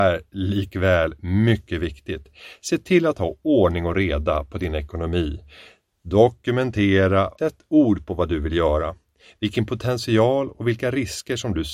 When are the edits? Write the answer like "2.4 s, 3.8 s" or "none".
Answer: 7.4 s